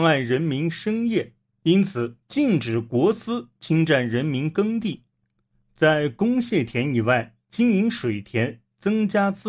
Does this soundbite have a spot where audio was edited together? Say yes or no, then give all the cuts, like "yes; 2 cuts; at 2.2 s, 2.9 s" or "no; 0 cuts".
no; 0 cuts